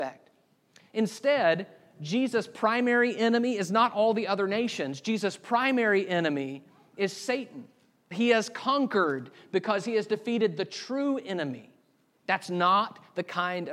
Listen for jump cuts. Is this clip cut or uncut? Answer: cut